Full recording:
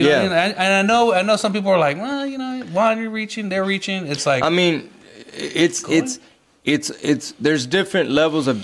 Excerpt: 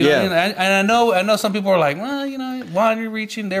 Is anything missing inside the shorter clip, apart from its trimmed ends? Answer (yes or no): no